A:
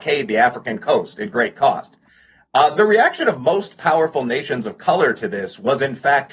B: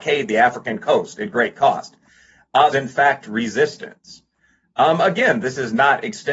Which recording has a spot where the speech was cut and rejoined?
B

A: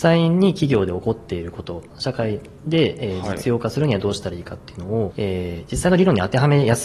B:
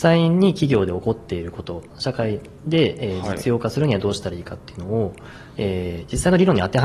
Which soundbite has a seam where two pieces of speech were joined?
A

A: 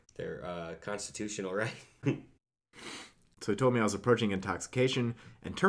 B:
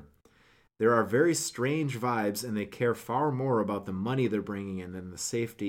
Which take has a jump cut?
A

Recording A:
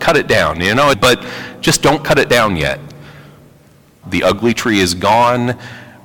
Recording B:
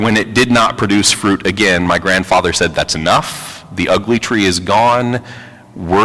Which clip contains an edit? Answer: A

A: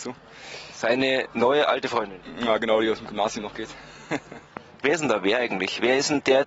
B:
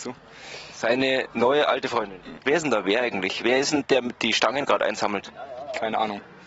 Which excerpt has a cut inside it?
B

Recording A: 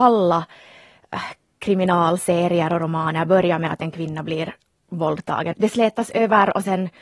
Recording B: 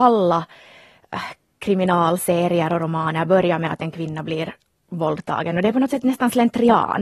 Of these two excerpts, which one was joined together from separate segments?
A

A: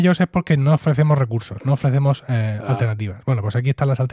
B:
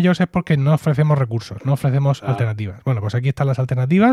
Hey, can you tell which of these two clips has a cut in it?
B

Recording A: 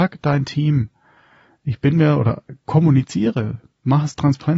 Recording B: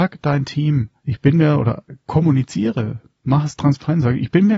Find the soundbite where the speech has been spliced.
B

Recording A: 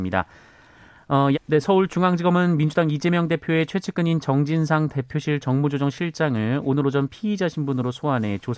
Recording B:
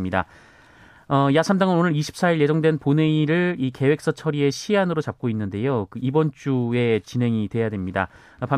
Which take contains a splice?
A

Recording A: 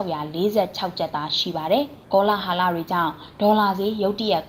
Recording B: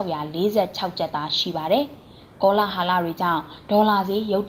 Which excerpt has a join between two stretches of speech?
A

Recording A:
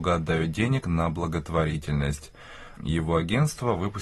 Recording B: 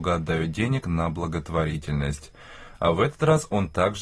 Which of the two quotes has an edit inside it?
A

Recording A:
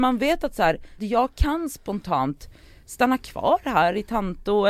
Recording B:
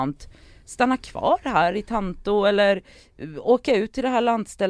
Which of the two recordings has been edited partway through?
A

